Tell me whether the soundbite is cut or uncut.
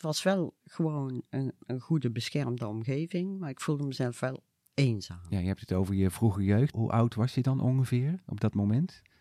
cut